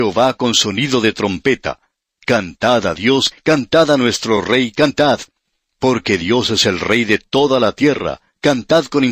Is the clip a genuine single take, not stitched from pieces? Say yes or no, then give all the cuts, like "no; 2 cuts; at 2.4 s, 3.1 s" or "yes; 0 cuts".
no; 1 cut; at 3.3 s